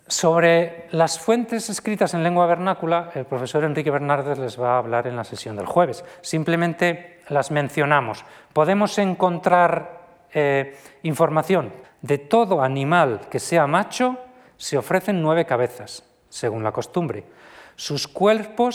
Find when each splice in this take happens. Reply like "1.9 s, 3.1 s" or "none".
11.8 s, 16.3 s

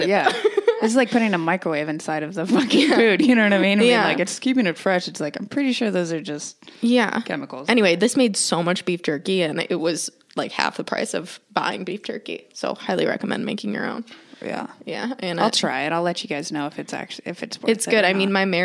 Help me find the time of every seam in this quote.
none

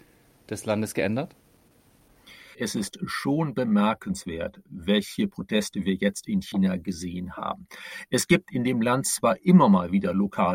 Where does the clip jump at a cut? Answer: 2.5 s

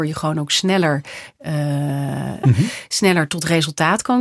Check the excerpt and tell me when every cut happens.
2.4 s

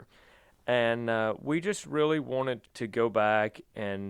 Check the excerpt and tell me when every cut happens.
2.6 s

